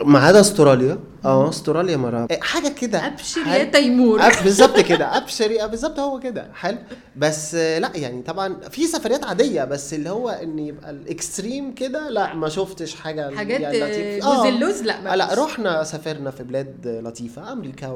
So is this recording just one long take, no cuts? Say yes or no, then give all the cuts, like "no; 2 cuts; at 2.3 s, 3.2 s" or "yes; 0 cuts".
no; 1 cut; at 2.3 s